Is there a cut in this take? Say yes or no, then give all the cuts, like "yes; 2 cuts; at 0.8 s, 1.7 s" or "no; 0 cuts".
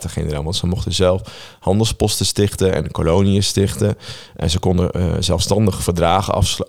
no; 0 cuts